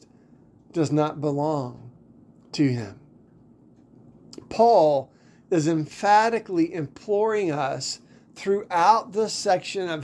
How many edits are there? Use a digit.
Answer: 0